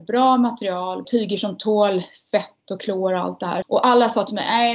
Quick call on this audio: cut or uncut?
cut